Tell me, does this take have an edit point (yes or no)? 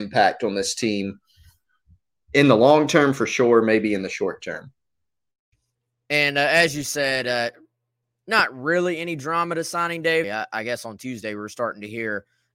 yes